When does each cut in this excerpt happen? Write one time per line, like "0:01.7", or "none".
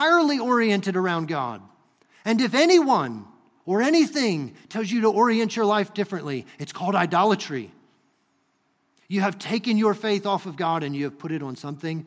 none